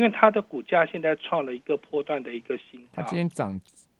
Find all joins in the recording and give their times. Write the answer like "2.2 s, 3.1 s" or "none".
none